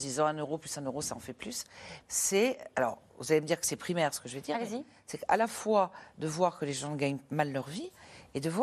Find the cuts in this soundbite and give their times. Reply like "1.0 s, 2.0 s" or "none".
2.0 s